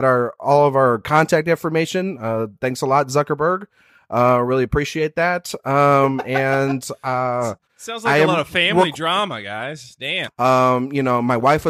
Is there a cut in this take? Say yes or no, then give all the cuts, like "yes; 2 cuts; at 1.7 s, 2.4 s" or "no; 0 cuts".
yes; 1 cut; at 10.3 s